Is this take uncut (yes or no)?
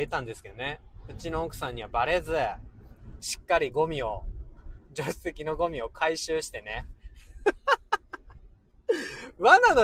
yes